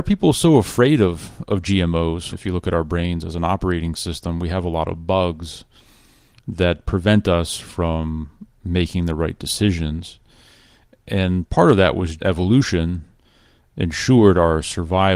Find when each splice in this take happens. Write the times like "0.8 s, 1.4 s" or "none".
2.3 s, 12.2 s